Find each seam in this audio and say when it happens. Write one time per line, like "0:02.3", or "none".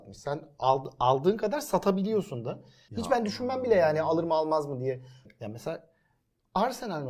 0:02.9
0:05.2